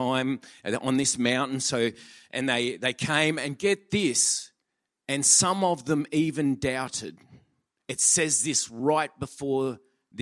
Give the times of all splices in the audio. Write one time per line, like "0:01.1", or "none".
none